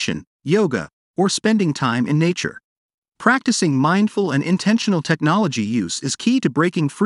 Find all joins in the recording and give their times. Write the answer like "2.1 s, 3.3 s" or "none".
3.0 s